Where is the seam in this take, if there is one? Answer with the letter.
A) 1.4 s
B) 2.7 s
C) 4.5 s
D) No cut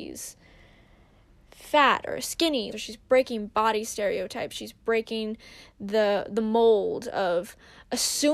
B